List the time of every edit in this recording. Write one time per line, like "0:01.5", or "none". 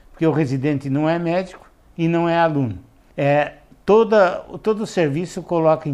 0:03.1